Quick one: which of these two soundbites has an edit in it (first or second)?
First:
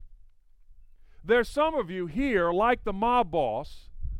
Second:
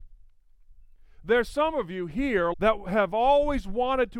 second